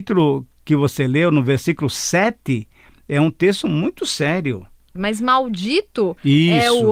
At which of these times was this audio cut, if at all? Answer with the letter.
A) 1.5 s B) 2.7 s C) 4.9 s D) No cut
C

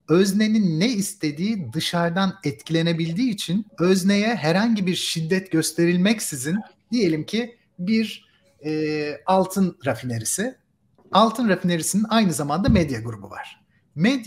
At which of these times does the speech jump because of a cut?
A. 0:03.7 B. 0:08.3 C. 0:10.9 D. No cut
A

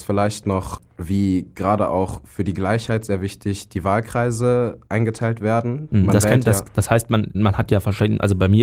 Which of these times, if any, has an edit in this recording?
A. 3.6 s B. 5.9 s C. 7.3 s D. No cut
C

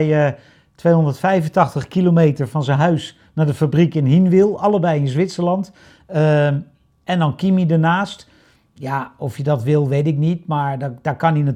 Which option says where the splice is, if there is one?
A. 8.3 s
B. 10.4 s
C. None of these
C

